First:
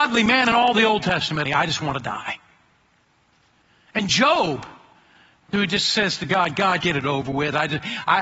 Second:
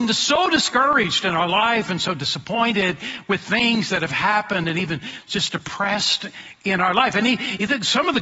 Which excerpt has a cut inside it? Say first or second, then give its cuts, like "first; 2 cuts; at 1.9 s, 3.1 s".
first; 3 cuts; at 1.5 s, 5.5 s, 6.8 s